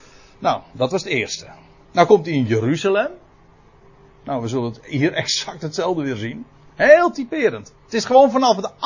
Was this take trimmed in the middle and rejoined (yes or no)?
no